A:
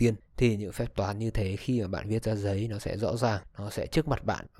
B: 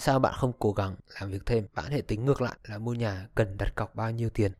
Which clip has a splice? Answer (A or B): B